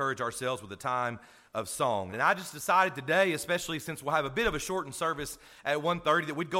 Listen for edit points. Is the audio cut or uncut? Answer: cut